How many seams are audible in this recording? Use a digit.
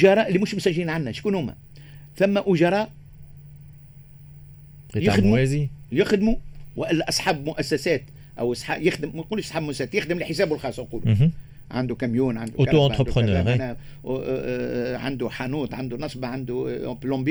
0